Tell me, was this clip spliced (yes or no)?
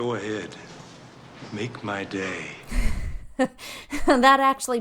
no